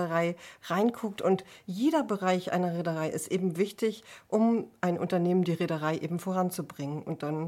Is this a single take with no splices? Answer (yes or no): yes